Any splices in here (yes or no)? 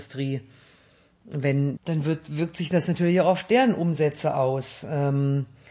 yes